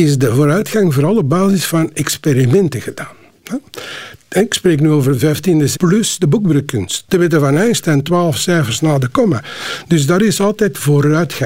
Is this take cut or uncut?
cut